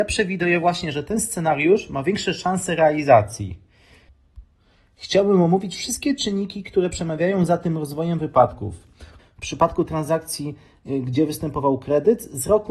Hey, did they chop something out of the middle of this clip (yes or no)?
yes